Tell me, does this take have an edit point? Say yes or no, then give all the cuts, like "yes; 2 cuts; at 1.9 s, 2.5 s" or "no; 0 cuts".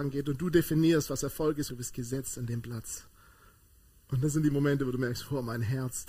yes; 1 cut; at 1.7 s